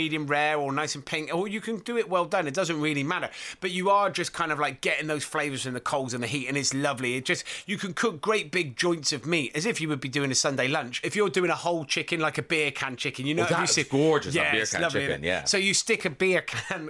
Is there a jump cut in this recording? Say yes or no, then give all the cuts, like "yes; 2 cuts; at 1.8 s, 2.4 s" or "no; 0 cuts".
yes; 1 cut; at 11.0 s